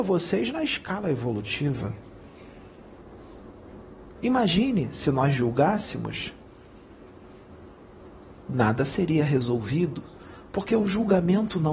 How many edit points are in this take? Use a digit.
1